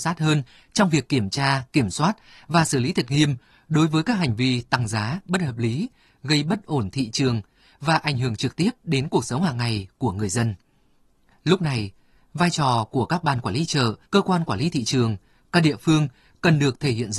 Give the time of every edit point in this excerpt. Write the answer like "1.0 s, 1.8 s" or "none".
11.4 s, 14.0 s